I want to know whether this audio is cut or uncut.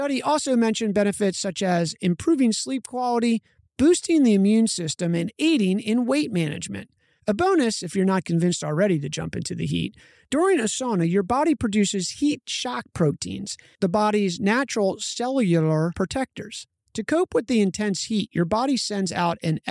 uncut